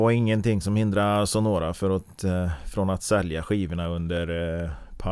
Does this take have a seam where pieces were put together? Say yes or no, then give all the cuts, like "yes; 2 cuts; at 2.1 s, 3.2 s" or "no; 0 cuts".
no; 0 cuts